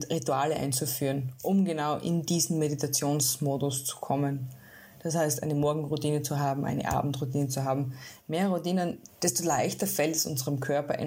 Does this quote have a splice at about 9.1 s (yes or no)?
yes